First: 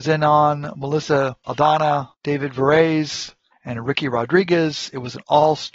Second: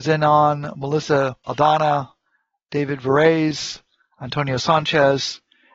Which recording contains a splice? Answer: first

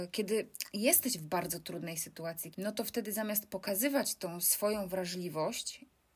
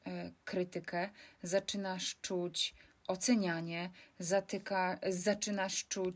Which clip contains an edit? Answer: first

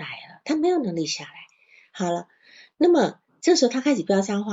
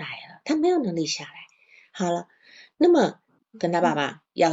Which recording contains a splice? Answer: second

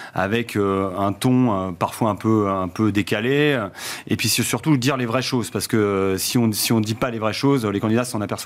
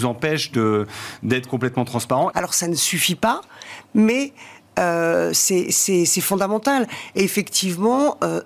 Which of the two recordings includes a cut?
second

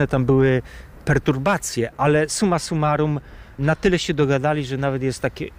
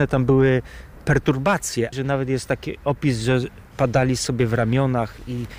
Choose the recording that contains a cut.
second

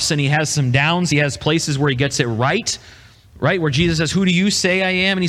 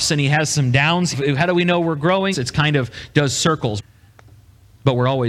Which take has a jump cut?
second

